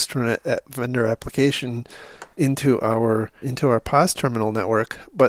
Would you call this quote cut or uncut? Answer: cut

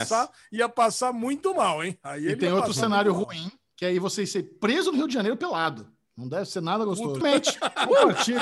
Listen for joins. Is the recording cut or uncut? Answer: cut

